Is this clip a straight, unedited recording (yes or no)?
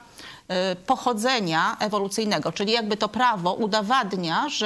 yes